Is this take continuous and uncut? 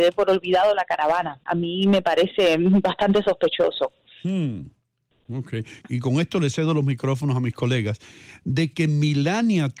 no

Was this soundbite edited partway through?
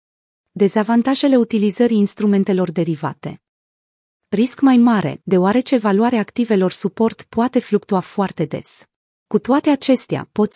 yes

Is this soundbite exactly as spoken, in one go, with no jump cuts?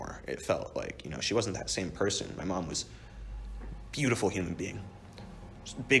yes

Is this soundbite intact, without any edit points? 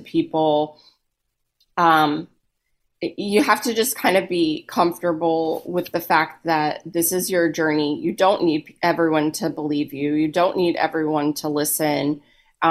yes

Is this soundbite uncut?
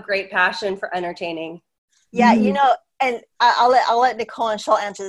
yes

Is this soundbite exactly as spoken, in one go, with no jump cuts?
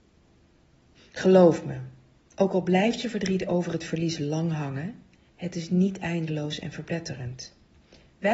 yes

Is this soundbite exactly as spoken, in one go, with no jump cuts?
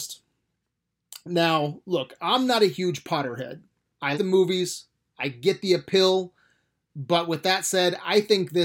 no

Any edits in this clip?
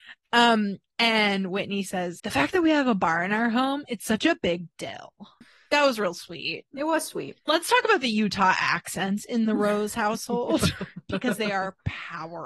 yes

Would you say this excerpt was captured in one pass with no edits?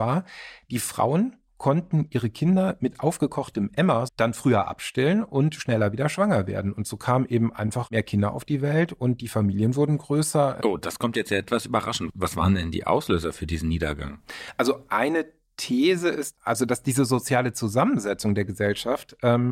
no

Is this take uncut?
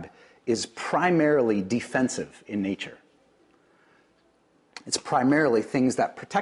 yes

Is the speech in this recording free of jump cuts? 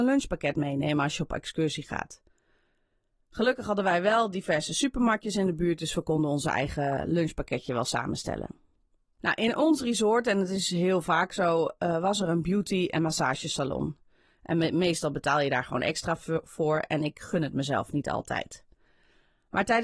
yes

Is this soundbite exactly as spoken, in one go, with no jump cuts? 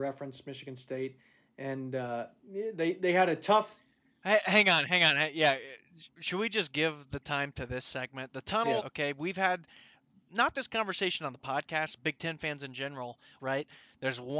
no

